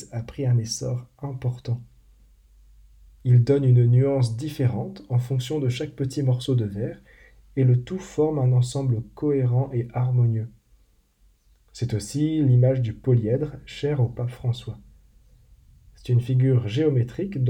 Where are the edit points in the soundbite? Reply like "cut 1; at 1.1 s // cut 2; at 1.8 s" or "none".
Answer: cut 1; at 3.1 s